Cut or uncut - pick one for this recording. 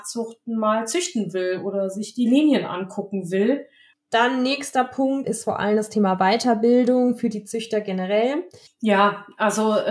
cut